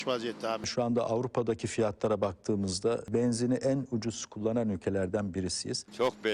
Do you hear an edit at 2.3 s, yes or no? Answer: no